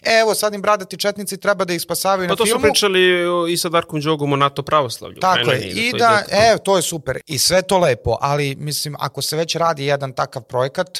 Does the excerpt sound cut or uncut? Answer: cut